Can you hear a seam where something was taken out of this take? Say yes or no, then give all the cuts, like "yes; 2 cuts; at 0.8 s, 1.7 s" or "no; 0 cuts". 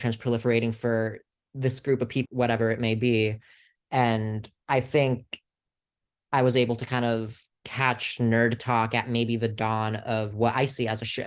yes; 1 cut; at 2.2 s